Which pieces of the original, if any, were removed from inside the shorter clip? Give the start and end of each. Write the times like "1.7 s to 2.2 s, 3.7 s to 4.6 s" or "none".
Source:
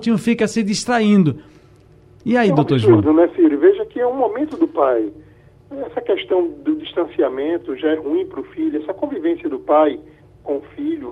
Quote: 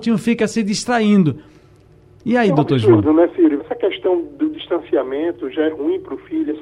3.6 s to 5.9 s